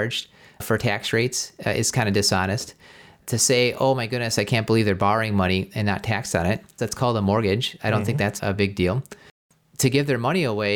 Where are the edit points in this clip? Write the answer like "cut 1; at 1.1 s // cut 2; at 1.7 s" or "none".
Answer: cut 1; at 6.8 s // cut 2; at 8.4 s